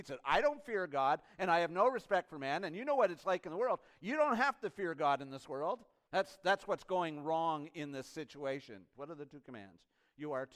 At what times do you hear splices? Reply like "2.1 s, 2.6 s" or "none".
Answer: 6.1 s, 8.9 s